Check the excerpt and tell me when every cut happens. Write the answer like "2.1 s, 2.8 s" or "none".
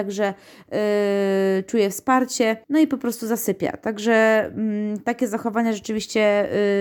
2.6 s